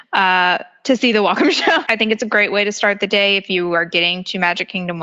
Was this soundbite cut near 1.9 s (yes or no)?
yes